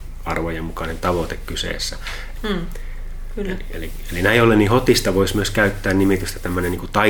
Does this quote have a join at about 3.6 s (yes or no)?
no